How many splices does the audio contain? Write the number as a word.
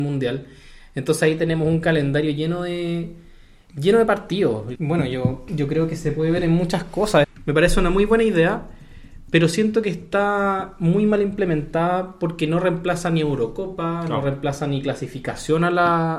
two